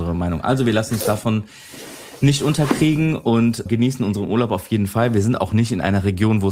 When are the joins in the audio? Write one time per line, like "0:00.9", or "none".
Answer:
0:03.7